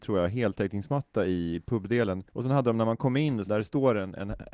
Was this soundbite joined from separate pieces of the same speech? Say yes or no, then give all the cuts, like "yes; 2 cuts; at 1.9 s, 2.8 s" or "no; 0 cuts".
yes; 2 cuts; at 2.3 s, 3.4 s